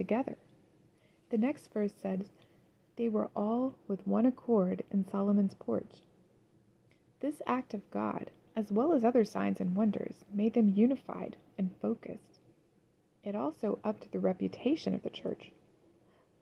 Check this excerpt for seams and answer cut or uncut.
uncut